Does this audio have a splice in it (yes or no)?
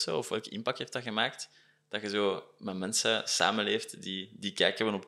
no